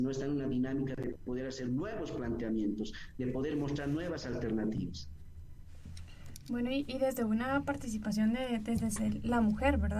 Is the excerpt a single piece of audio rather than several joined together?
yes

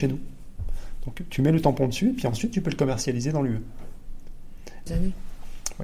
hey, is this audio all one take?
no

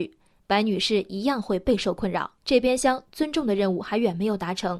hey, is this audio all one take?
no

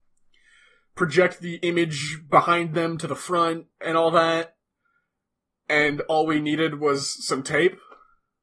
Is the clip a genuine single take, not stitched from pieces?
no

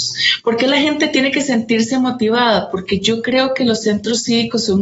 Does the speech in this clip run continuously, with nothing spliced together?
yes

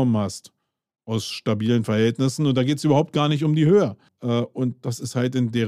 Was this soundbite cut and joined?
yes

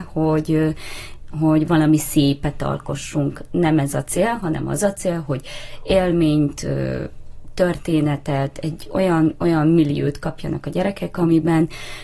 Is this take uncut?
yes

